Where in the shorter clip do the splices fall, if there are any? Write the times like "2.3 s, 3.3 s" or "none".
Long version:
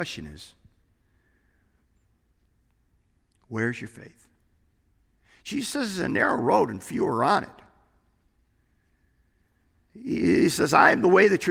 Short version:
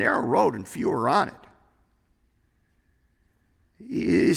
none